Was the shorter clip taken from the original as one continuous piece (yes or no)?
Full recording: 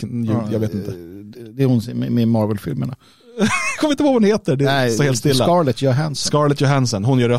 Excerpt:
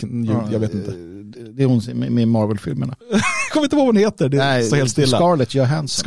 no